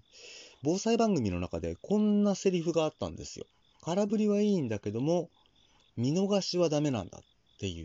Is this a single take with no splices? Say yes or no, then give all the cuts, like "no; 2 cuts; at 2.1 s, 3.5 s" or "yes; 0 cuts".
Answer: no; 1 cut; at 3.6 s